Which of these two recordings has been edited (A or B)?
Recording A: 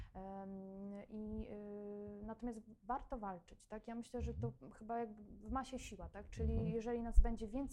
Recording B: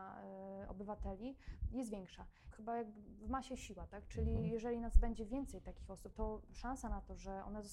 B